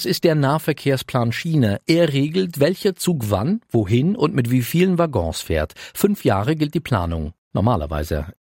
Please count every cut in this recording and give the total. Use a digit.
0